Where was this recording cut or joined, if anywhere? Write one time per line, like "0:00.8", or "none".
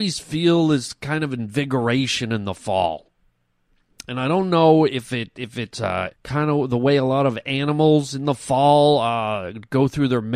0:06.1